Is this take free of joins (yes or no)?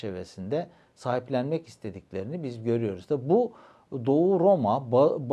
yes